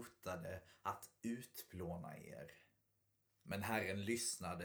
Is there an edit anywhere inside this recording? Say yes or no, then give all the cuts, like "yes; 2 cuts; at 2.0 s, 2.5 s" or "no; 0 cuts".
no; 0 cuts